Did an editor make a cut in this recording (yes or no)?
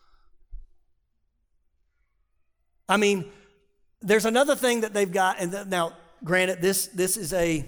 no